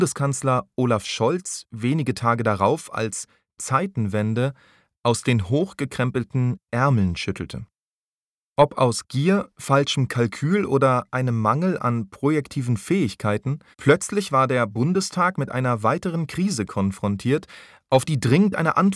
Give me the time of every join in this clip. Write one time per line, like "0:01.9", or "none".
0:08.5
0:13.7

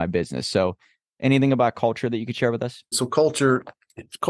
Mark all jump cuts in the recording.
0:02.9

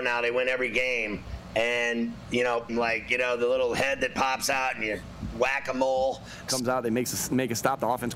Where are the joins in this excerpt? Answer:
0:02.7
0:06.5

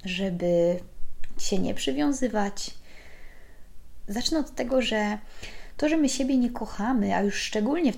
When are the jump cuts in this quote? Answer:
0:04.0

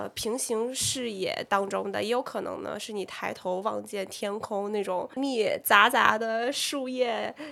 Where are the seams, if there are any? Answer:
0:05.2

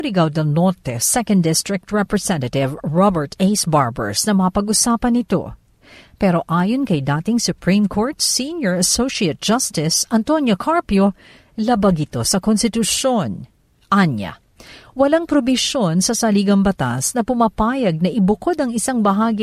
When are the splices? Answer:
none

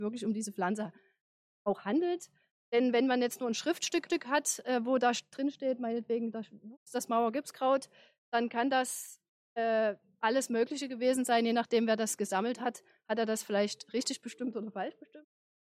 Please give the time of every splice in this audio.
none

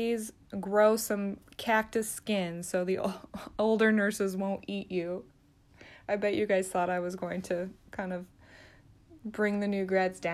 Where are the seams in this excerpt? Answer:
none

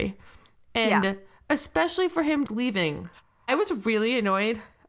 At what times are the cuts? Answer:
0:02.5

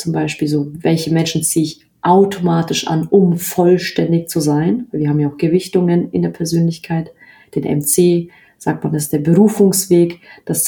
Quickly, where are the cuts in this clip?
none

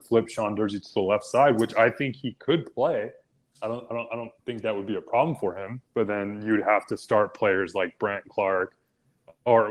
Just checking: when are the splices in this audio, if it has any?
0:04.4
0:05.8

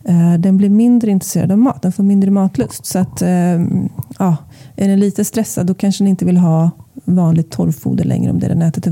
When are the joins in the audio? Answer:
none

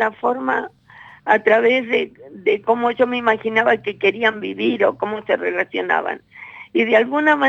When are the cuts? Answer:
none

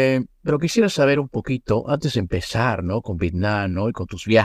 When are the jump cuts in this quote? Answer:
none

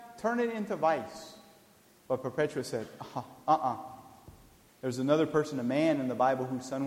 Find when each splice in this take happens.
0:02.0
0:04.7

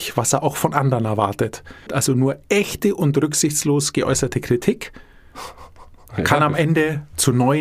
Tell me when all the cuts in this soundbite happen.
0:01.9
0:06.1

